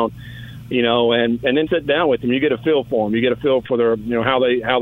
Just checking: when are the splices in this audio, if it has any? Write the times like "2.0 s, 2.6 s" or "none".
1.7 s